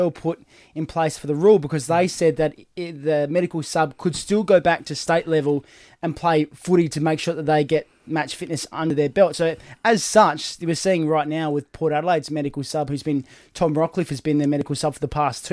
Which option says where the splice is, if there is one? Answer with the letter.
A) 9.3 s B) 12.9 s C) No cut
C